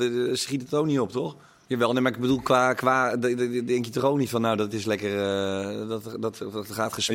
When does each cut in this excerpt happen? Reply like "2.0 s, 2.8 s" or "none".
1.7 s